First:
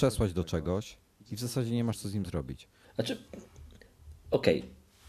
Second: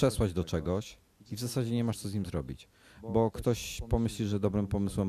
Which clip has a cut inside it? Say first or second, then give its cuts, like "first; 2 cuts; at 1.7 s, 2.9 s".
first; 1 cut; at 2.8 s